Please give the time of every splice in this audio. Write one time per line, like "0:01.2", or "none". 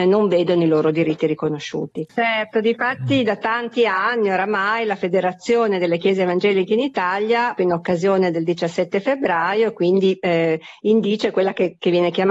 0:02.1
0:07.6